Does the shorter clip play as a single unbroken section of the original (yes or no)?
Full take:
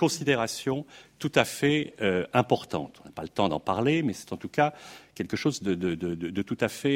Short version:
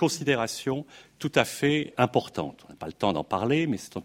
no